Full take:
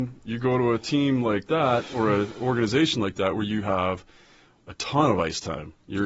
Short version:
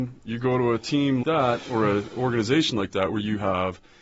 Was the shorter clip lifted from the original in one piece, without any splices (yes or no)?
no